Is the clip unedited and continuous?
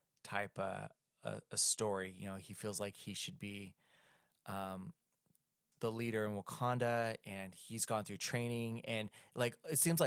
yes; 0 cuts

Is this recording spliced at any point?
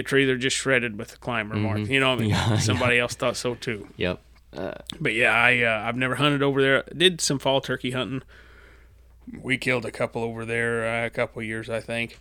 no; 0 cuts

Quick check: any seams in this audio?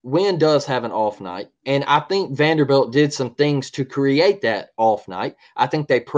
no; 0 cuts

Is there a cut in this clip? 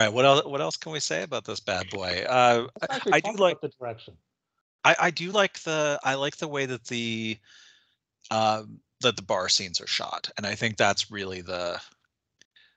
no; 0 cuts

